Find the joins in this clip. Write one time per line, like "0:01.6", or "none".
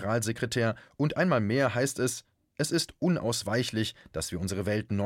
none